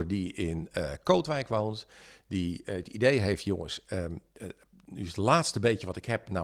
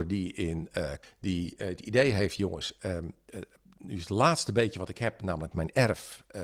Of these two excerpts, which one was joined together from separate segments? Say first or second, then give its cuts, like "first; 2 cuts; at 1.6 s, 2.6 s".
second; 1 cut; at 1.0 s